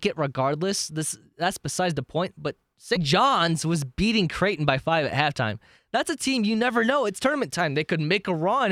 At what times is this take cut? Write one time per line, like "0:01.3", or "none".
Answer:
0:02.9